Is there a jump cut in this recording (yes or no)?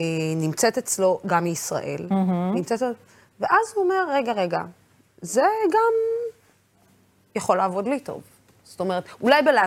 no